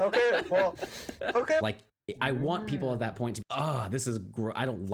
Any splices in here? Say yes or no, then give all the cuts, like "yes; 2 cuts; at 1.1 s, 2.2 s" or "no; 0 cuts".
yes; 2 cuts; at 1.6 s, 3.4 s